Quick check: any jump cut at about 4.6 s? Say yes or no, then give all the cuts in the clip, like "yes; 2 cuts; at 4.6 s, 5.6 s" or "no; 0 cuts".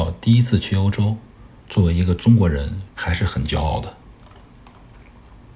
no; 2 cuts; at 1.6 s, 2.9 s